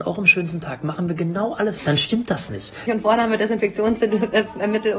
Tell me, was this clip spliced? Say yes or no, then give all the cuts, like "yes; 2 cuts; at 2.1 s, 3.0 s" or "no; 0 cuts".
yes; 2 cuts; at 1.8 s, 2.9 s